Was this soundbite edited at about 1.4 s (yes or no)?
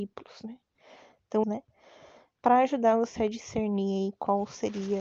yes